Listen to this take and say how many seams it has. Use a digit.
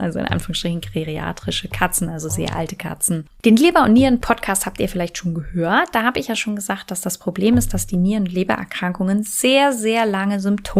1